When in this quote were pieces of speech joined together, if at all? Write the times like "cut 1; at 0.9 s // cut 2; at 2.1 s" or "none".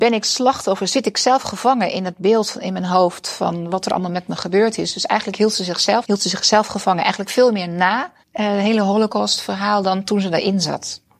cut 1; at 6.0 s // cut 2; at 8.2 s